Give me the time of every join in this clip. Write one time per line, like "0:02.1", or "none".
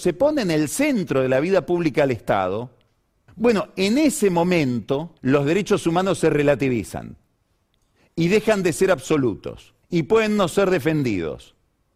0:03.3
0:05.2
0:09.8